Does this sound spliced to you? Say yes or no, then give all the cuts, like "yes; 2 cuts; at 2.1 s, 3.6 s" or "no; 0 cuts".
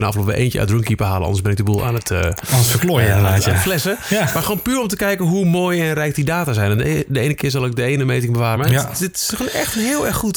yes; 1 cut; at 8.6 s